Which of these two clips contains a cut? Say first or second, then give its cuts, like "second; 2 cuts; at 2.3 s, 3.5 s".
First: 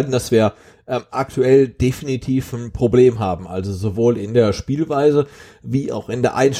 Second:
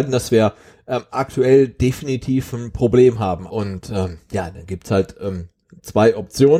second; 1 cut; at 3.5 s